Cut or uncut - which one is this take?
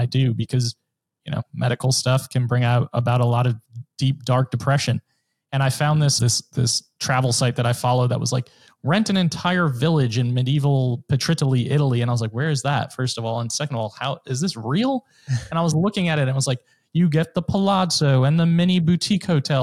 cut